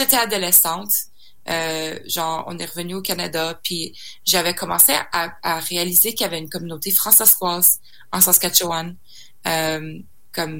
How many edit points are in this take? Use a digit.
0